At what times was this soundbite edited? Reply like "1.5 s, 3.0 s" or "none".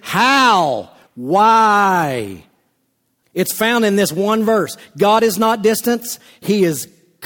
1.1 s, 3.2 s